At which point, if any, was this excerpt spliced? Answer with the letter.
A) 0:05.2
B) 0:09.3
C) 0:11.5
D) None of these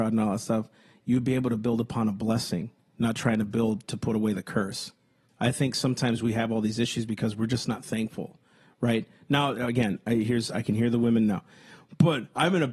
A